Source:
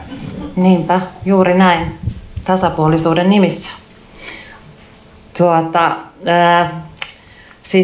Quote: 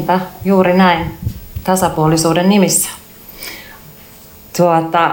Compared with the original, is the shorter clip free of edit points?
yes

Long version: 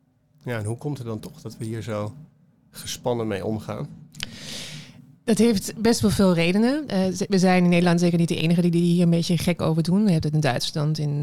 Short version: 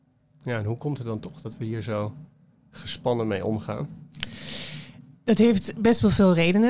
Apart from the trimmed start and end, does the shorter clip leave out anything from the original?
no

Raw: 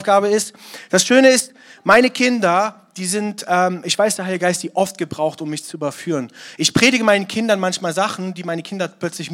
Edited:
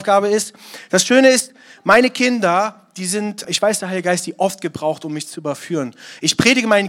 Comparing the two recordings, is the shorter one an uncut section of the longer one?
no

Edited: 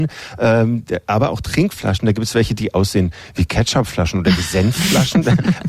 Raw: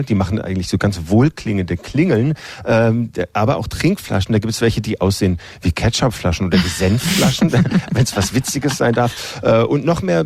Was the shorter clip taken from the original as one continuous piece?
yes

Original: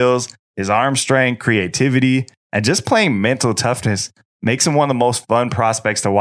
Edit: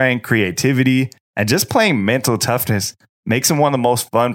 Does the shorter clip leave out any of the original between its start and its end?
no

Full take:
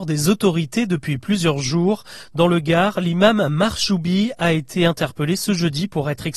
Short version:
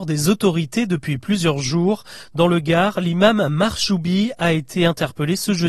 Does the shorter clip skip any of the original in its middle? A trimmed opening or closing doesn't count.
no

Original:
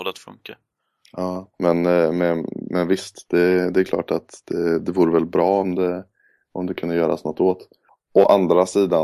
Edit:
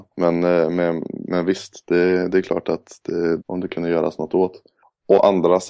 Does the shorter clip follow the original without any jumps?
no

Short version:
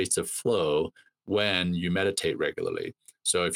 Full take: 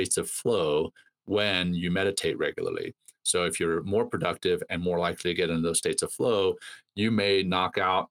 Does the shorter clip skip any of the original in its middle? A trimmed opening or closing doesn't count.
no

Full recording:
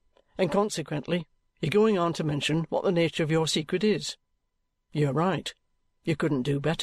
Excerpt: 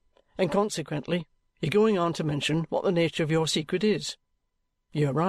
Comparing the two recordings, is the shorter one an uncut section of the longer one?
yes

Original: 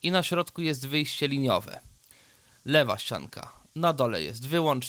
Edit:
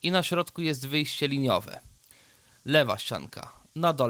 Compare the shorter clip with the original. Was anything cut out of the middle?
no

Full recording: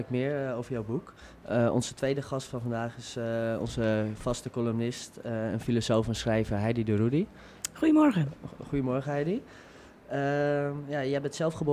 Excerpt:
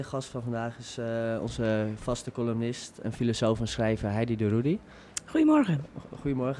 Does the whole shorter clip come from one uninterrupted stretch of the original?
no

